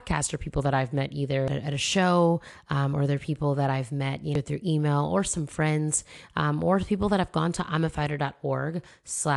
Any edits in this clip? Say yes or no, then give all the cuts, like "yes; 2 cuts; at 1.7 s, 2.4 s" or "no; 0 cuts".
no; 0 cuts